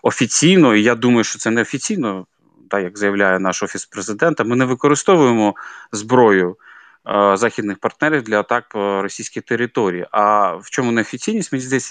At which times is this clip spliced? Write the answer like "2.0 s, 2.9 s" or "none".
none